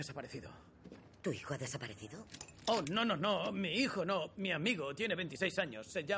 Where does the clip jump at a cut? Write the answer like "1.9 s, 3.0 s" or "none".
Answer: 2.8 s